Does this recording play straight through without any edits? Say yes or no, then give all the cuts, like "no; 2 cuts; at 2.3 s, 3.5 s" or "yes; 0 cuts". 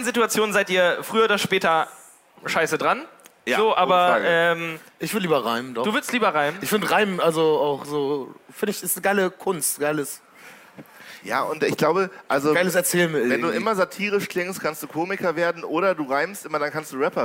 yes; 0 cuts